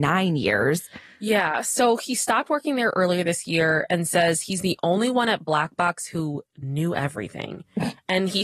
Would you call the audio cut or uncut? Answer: uncut